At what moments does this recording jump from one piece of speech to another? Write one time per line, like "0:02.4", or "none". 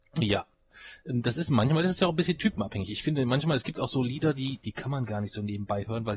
0:04.6

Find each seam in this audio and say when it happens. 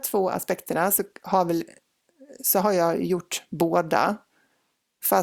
none

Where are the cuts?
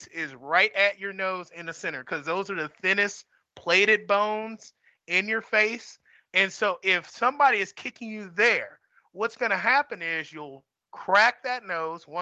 0:06.3

